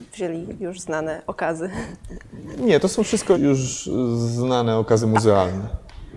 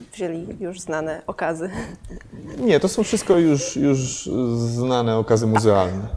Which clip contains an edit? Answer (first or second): first